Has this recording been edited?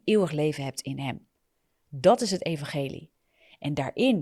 no; 0 cuts

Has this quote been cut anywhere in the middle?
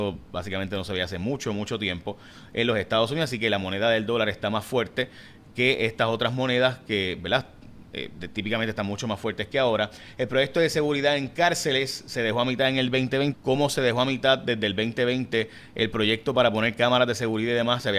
yes; 1 cut; at 13.3 s

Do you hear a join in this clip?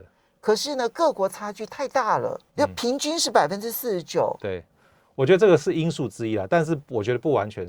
yes; 2 cuts; at 2.5 s, 4.7 s

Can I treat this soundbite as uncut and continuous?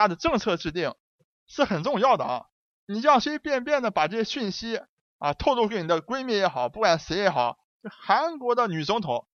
no; 2 cuts; at 3.2 s, 7.7 s

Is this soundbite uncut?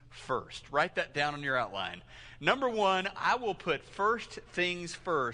yes; 0 cuts

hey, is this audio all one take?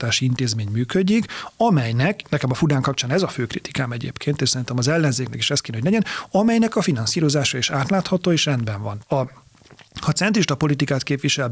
no; 2 cuts; at 2.2 s, 9.0 s

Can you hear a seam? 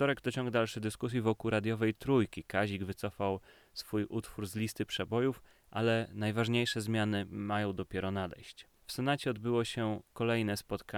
yes; 1 cut; at 8.8 s

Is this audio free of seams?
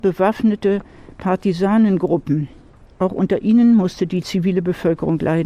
yes; 0 cuts

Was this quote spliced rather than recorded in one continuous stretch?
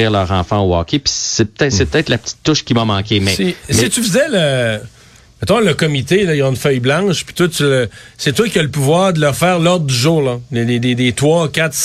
no; 0 cuts

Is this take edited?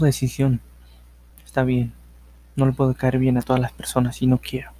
yes; 1 cut; at 1.3 s

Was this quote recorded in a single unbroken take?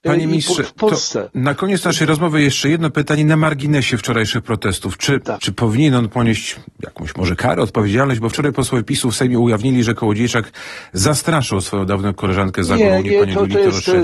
no; 1 cut; at 5.4 s

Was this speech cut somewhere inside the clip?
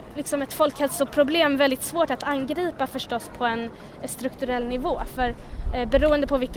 no; 0 cuts

